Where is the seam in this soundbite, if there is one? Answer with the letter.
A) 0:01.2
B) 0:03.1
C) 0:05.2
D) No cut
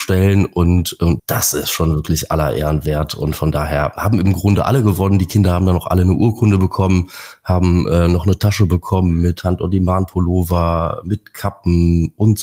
A